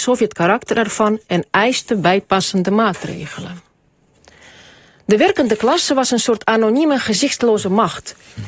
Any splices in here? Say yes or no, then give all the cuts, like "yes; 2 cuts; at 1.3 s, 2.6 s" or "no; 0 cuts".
no; 0 cuts